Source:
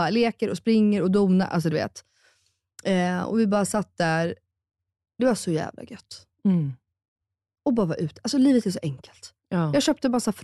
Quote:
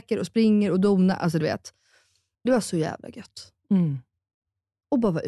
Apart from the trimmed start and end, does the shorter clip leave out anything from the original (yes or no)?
yes